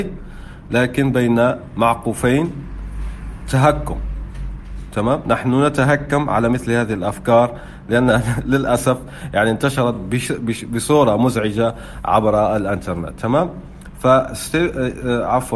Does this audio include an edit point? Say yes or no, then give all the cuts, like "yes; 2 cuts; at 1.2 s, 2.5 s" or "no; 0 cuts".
no; 0 cuts